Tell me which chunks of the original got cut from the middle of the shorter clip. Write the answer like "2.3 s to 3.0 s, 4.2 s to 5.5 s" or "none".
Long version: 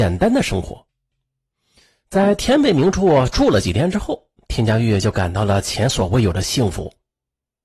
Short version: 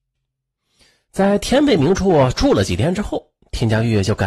none